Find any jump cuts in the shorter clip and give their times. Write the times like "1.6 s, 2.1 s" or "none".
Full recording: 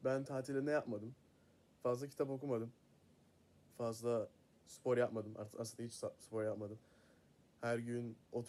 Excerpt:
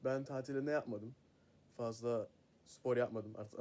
1.5 s